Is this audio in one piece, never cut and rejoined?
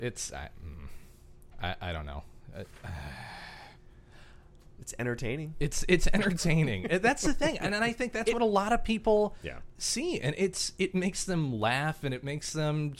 yes; 0 cuts

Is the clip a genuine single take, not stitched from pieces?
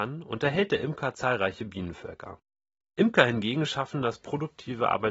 no; 1 cut; at 2.8 s

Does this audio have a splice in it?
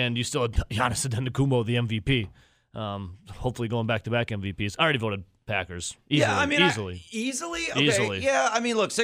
no; 0 cuts

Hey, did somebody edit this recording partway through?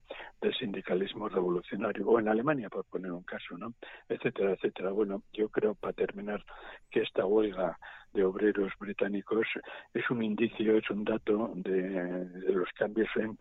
no; 0 cuts

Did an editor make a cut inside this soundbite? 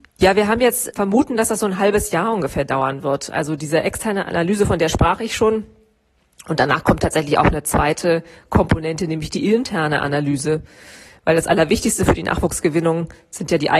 yes; 1 cut; at 0.9 s

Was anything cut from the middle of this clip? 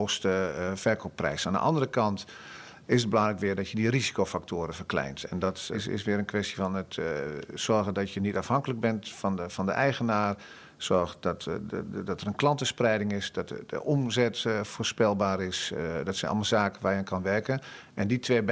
no; 0 cuts

